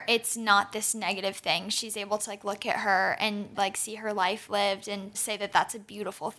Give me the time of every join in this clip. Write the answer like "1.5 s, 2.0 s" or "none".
3.5 s, 5.1 s